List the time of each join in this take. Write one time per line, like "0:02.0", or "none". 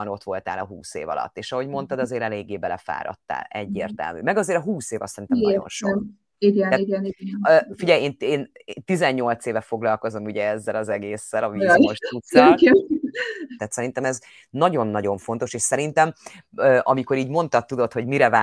0:13.6